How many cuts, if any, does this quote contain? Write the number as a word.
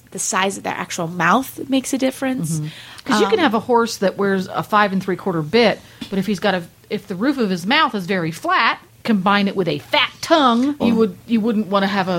two